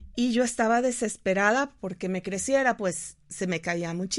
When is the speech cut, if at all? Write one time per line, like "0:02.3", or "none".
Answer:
0:02.8